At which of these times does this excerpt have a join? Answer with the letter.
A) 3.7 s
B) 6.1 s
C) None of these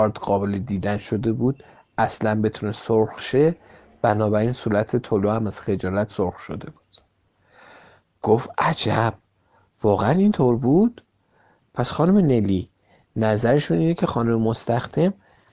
B